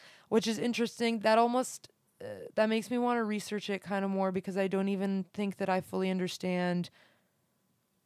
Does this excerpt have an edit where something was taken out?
no; 0 cuts

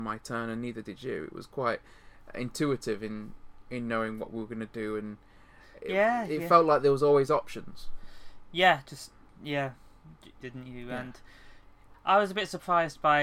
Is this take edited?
yes; 2 cuts; at 10.4 s, 11.9 s

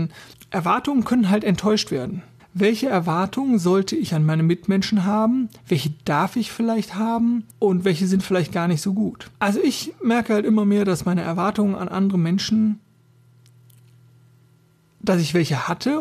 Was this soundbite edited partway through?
yes; 3 cuts; at 2.4 s, 7.5 s, 9.3 s

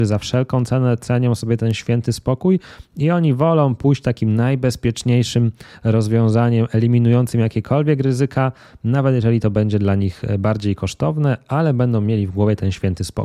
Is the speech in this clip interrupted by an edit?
no; 0 cuts

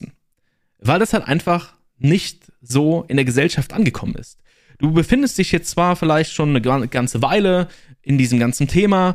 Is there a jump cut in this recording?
no; 0 cuts

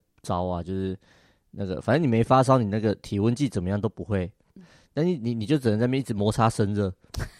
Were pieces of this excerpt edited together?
yes; 1 cut; at 4.6 s

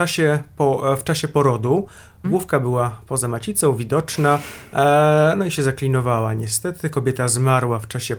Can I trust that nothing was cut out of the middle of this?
no; 1 cut; at 2.2 s

